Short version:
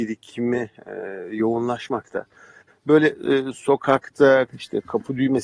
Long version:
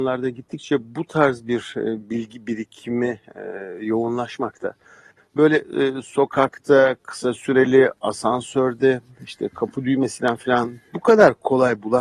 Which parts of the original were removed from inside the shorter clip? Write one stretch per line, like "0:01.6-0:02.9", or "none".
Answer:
0:07.0-0:09.2